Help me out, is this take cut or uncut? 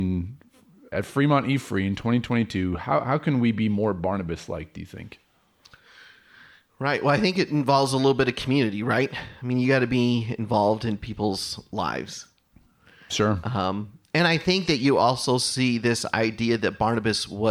cut